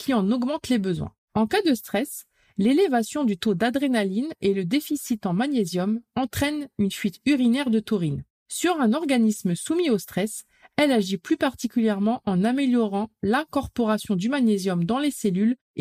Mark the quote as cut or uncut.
uncut